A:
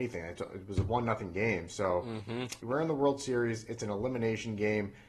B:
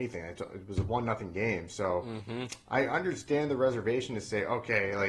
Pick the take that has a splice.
A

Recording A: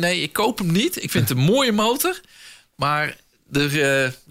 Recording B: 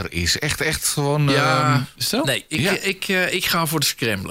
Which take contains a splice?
B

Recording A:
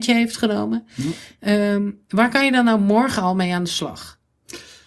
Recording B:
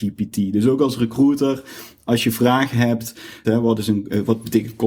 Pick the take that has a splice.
B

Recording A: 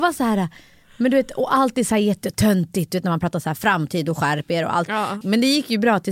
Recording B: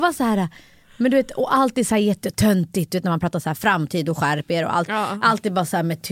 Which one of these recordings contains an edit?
A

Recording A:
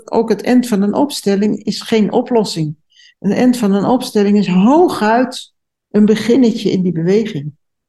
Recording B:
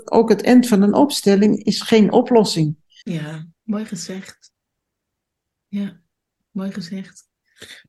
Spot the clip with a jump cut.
B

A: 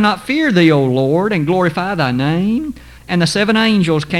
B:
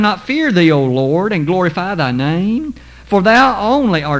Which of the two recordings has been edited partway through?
A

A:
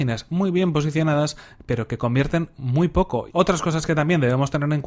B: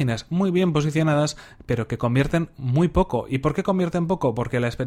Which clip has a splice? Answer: A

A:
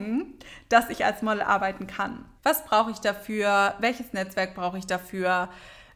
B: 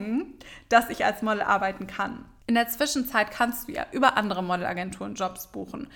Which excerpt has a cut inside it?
A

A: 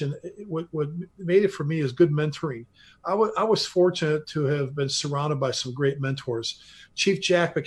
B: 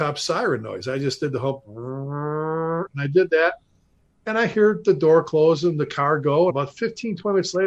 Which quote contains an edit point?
B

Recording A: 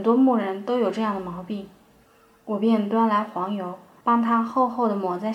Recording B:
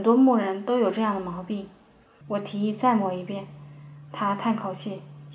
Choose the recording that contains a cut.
B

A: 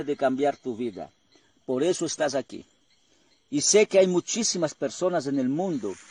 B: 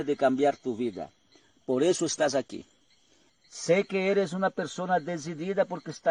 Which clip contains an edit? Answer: B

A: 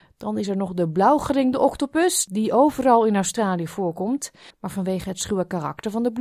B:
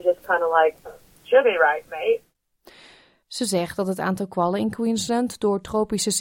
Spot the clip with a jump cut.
A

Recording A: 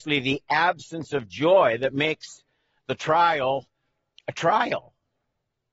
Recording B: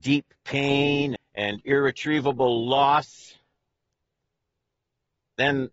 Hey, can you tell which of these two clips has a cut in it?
B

